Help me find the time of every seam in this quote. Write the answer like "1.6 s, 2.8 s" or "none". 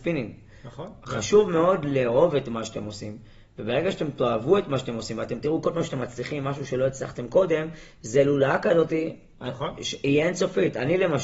none